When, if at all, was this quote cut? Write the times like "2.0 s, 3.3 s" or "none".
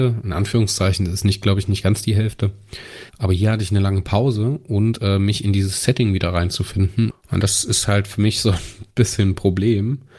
3.1 s, 7.1 s